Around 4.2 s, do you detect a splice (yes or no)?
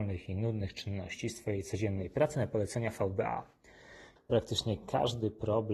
yes